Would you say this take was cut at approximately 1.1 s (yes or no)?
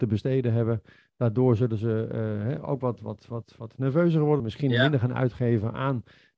no